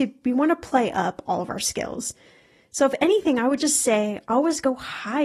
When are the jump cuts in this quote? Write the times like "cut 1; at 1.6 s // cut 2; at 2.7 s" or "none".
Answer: none